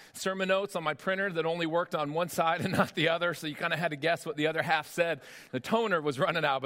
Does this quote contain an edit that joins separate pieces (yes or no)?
no